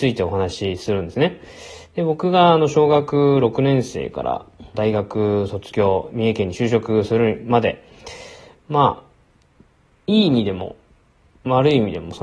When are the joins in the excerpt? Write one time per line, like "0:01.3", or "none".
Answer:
0:04.7
0:06.1